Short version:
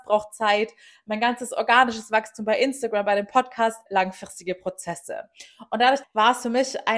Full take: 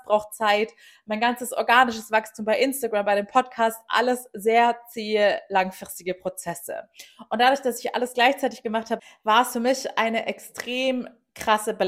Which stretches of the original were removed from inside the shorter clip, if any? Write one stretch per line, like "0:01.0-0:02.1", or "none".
0:03.9-0:05.5
0:07.6-0:09.1